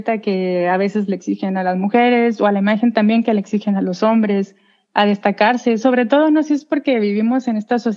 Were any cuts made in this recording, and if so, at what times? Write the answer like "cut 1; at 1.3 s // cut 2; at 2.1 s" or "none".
none